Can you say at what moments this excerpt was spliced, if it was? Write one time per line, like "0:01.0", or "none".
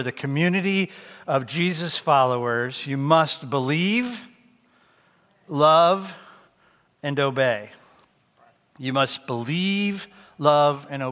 none